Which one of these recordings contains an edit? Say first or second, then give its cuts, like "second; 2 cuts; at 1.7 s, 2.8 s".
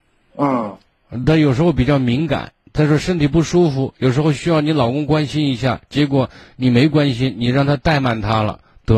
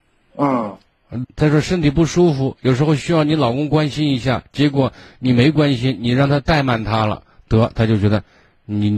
second; 1 cut; at 1.2 s